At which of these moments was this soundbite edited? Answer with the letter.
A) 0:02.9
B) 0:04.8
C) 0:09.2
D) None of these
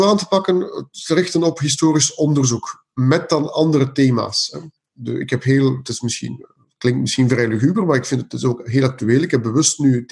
D